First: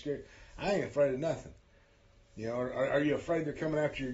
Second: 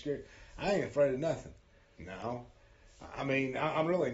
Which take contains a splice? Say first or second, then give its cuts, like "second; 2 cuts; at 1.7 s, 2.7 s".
second; 1 cut; at 2.0 s